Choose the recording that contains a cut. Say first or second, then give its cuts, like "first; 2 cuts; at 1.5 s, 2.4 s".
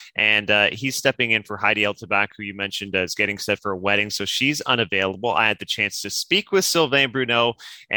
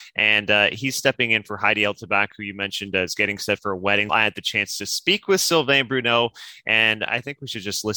second; 2 cuts; at 4.1 s, 7.1 s